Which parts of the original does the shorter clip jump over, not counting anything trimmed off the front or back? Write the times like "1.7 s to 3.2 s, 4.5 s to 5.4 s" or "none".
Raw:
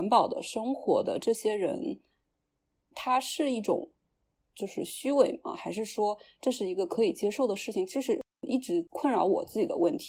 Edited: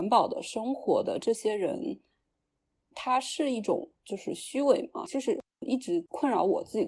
4.0 s to 4.5 s, 5.6 s to 7.9 s